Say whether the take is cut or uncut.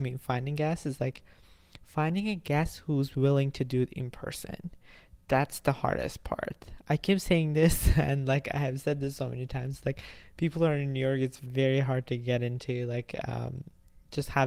uncut